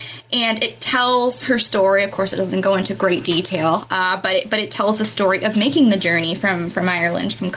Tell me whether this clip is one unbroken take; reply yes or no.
yes